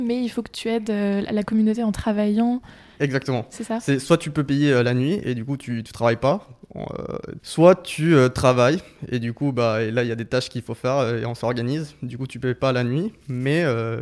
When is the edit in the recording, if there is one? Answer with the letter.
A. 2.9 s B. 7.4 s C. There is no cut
B